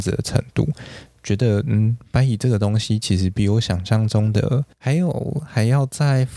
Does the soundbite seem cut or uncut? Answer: cut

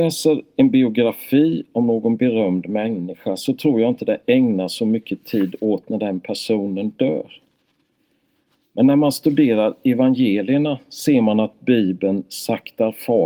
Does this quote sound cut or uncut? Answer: uncut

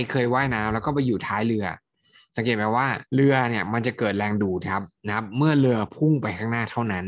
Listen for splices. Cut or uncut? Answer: cut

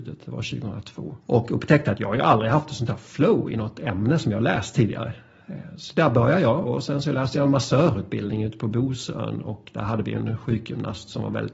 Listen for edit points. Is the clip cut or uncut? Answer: cut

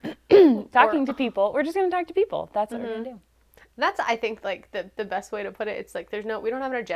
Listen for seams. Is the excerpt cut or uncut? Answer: uncut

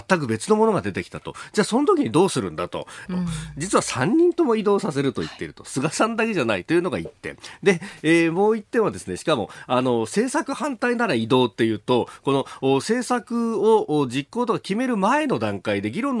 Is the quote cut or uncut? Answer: cut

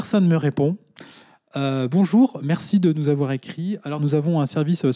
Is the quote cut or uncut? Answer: uncut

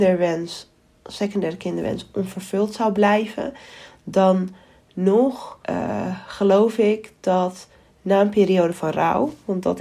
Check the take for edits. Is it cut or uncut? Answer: cut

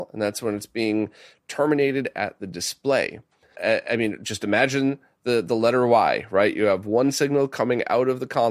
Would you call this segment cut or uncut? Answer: cut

